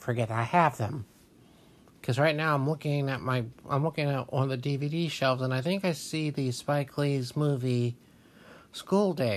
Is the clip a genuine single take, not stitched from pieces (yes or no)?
yes